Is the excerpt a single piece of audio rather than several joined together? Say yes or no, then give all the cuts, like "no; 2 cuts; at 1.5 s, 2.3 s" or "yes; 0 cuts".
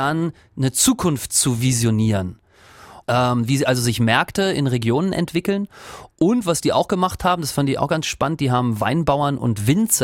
no; 1 cut; at 3.0 s